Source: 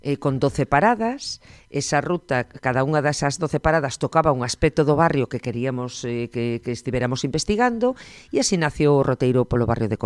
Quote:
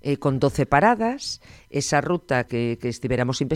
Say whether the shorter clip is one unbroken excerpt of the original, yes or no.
no